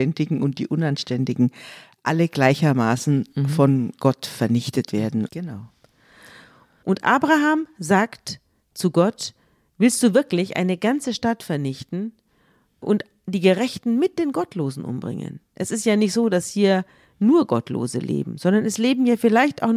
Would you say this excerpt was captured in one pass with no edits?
no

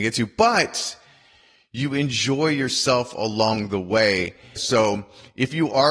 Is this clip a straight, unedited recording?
no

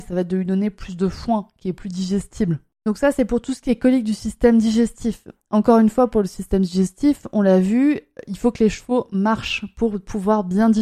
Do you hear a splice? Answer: no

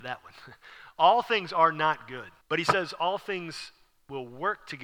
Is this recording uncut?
no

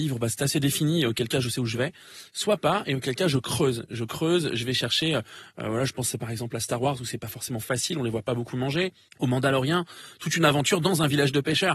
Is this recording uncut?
yes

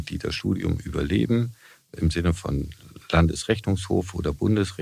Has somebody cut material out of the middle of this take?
no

